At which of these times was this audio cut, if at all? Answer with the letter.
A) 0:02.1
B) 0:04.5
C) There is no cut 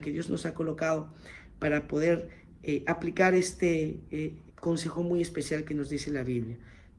B